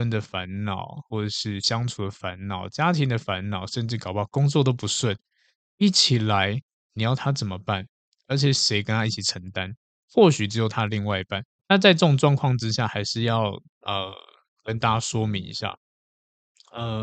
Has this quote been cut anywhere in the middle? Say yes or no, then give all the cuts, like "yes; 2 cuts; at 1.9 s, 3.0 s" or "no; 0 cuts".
yes; 1 cut; at 11.5 s